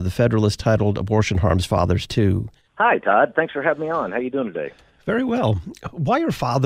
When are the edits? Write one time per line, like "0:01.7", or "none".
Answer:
0:02.6